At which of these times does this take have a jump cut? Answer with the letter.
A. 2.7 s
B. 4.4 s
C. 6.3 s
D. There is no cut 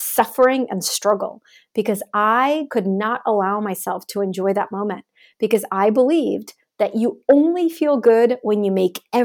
A